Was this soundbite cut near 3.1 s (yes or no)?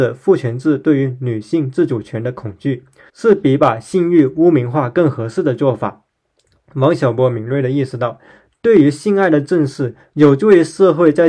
yes